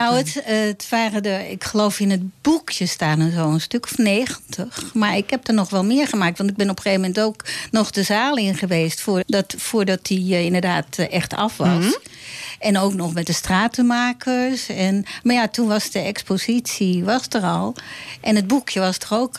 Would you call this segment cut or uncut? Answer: cut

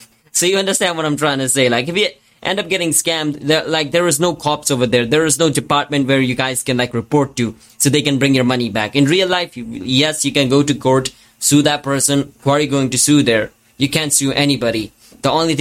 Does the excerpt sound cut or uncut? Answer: uncut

